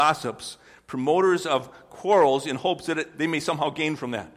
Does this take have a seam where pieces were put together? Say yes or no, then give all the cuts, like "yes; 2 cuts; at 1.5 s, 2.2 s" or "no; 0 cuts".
no; 0 cuts